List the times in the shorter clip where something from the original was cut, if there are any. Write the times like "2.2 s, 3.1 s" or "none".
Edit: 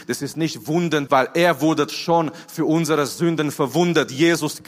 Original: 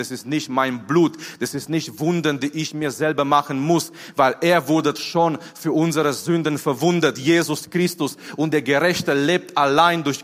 1.1 s